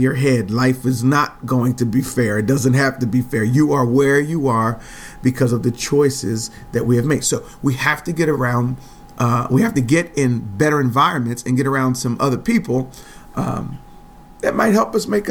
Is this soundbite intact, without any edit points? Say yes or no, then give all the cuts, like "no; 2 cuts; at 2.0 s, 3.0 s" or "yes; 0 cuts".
yes; 0 cuts